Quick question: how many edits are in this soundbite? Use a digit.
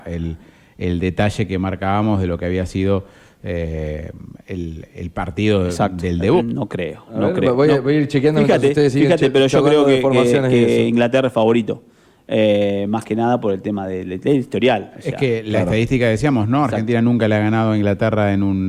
1